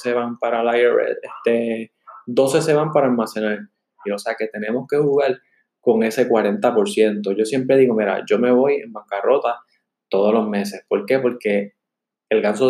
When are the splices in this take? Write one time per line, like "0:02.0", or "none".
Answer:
0:04.1